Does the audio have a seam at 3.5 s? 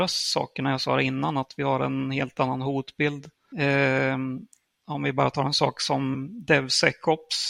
yes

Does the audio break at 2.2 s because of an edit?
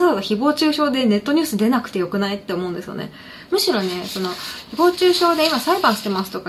no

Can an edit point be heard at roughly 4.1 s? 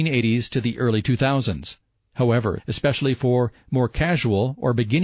no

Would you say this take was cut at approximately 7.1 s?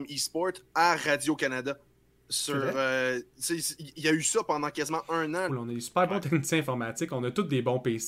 no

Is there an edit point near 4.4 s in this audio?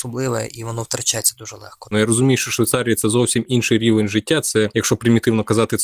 no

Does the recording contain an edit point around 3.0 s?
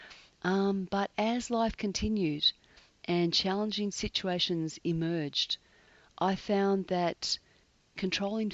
no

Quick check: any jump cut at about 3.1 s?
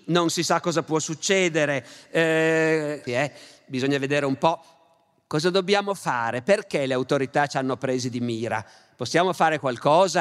yes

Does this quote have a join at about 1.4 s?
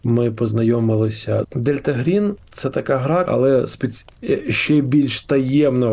yes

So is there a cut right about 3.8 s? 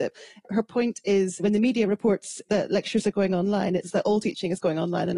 yes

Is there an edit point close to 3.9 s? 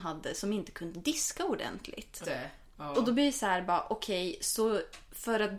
no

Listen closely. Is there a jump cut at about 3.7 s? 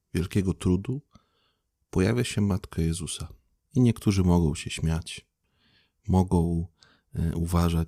yes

